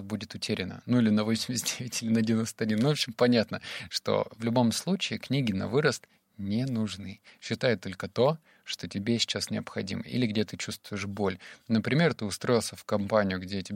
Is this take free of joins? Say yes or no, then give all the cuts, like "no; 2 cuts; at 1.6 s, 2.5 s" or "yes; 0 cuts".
yes; 0 cuts